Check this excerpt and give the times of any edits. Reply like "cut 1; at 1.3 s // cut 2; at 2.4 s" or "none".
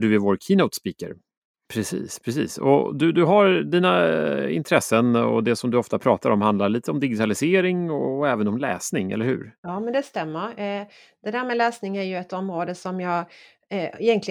cut 1; at 1.7 s